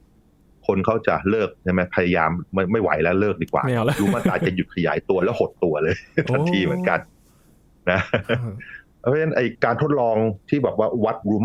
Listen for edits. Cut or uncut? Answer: uncut